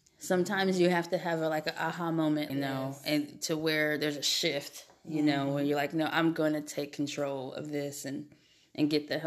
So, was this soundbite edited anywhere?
yes; 1 cut; at 2.5 s

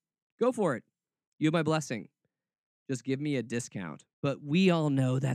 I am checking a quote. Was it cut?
yes; 1 cut; at 4.1 s

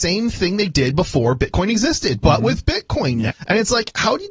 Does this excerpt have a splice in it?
yes; 1 cut; at 3.3 s

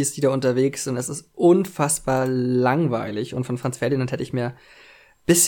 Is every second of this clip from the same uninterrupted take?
yes; 0 cuts

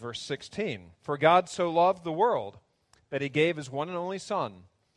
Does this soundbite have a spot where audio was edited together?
yes; 1 cut; at 0.9 s

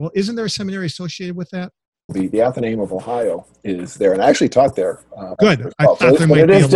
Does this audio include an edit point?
yes; 2 cuts; at 2.1 s, 5.4 s

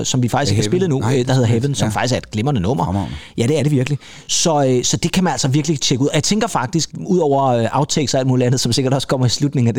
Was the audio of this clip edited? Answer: no; 0 cuts

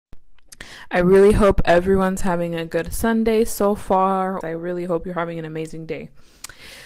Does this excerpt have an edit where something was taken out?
yes; 1 cut; at 4.4 s

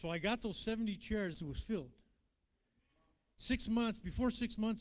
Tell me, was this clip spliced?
yes; 1 cut; at 1.3 s

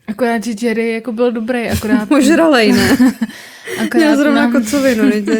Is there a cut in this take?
no; 0 cuts

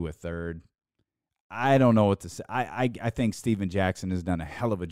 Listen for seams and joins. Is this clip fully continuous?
yes; 0 cuts

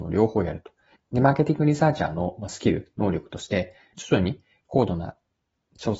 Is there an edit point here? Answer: yes; 2 cuts; at 0.9 s, 3.9 s

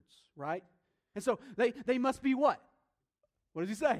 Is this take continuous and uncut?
no; 1 cut; at 1.1 s

